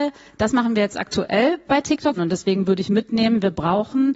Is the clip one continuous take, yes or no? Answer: no